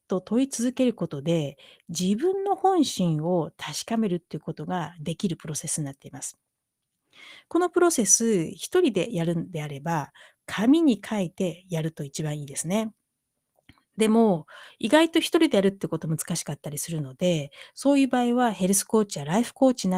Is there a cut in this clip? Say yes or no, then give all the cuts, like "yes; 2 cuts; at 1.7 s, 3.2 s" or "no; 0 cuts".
no; 0 cuts